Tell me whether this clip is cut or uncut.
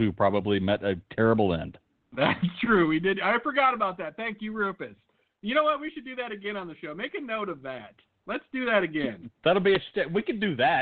uncut